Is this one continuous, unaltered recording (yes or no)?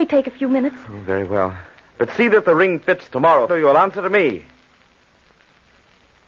no